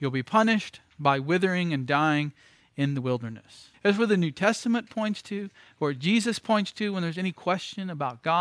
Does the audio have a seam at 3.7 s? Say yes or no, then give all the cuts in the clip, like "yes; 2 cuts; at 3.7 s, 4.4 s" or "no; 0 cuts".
yes; 1 cut; at 3.7 s